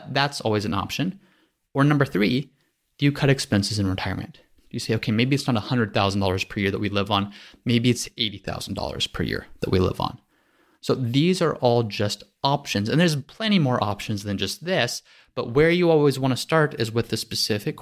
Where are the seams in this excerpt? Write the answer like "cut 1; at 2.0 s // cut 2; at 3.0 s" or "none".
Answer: none